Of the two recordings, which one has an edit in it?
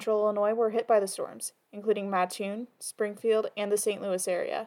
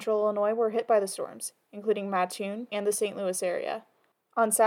second; 1 cut; at 2.7 s

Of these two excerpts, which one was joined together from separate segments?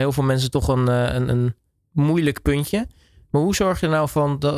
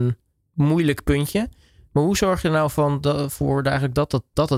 first; 1 cut; at 1.3 s

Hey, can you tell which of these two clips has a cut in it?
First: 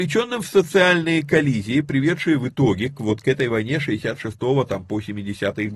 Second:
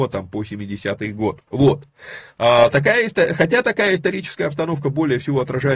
second; 1 cut; at 1.5 s

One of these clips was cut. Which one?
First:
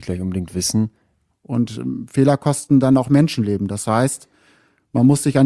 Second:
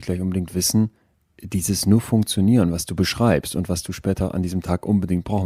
first; 1 cut; at 1.3 s

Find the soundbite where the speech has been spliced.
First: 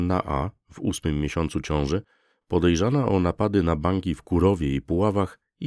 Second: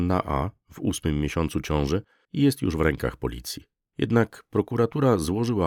second; 2 cuts; at 2.2 s, 3.8 s

